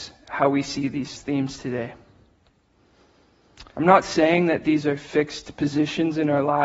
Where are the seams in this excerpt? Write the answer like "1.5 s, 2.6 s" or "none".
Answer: 3.7 s